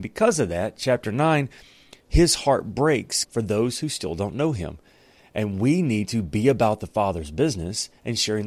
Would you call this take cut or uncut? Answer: cut